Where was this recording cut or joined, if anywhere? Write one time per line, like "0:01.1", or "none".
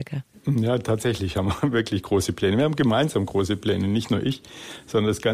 none